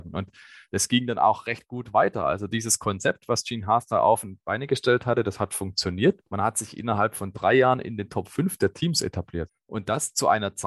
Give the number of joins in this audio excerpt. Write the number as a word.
two